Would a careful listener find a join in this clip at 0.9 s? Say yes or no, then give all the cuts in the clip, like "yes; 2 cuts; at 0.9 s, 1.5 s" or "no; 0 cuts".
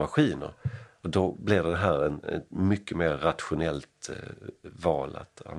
no; 0 cuts